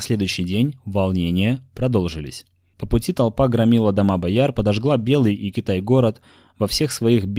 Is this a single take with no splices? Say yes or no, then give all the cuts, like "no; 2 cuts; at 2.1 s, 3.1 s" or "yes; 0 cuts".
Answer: no; 1 cut; at 2.7 s